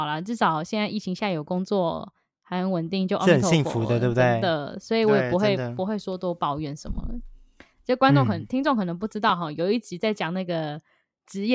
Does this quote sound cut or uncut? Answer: uncut